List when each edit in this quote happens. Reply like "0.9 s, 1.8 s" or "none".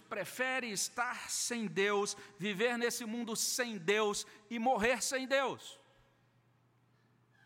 none

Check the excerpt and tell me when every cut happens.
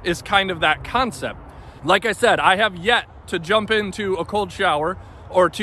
1.8 s

